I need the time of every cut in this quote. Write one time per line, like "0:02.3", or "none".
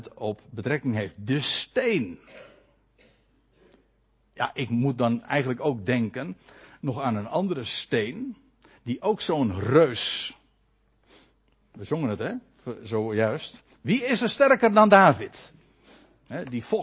none